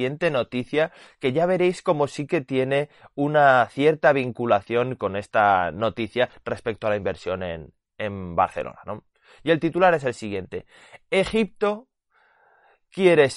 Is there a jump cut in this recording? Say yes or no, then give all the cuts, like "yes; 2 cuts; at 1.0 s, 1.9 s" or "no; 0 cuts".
no; 0 cuts